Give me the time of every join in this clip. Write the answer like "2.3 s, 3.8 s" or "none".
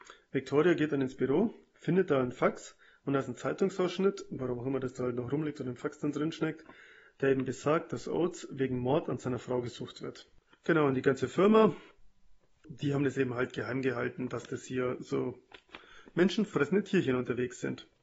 10.5 s, 12.6 s